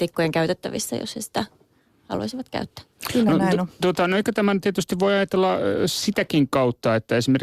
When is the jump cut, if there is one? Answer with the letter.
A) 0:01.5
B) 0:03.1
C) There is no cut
C